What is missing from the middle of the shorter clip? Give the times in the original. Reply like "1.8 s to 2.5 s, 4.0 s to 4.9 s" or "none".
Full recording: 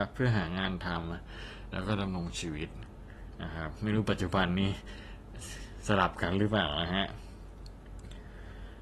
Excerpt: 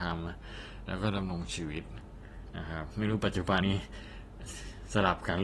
4.4 s to 4.5 s